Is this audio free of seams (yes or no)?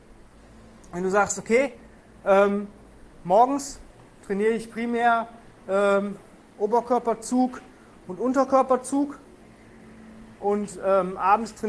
yes